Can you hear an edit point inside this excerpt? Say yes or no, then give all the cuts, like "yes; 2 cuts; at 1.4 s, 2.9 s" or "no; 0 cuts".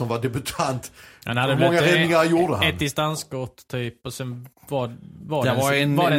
no; 0 cuts